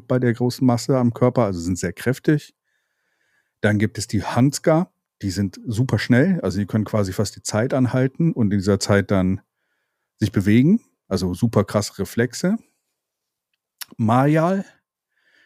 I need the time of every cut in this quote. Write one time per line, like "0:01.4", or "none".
none